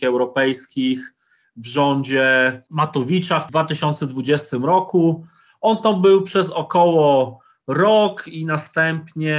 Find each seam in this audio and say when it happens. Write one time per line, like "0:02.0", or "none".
none